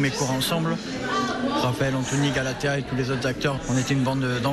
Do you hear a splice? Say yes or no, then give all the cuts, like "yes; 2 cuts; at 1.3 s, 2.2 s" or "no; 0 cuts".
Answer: no; 0 cuts